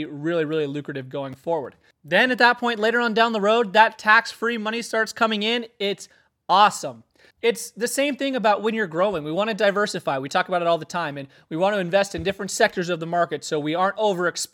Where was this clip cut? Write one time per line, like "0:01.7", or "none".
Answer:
0:07.3